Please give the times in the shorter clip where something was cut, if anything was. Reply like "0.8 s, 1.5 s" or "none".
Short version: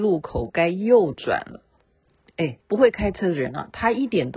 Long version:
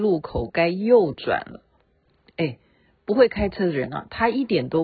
2.6 s